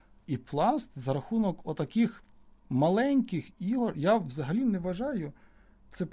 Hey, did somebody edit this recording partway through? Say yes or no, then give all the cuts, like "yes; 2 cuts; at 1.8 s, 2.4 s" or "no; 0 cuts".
no; 0 cuts